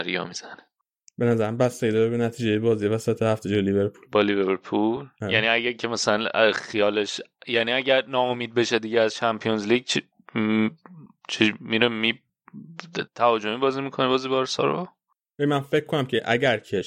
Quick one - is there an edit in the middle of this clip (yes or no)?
no